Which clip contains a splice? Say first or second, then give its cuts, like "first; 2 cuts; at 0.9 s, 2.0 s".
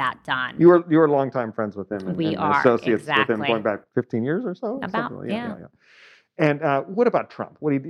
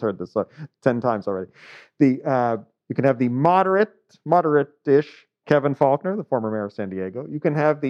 first; 1 cut; at 3.9 s